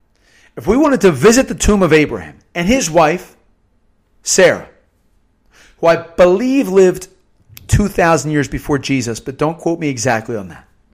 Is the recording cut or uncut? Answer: uncut